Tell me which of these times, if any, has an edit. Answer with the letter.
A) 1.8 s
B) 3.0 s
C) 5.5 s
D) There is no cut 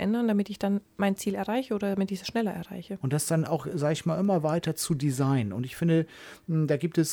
B